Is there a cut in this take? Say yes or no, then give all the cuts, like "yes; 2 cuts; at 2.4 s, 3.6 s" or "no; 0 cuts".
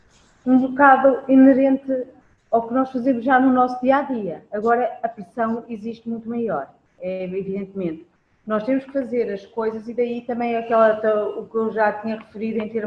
no; 0 cuts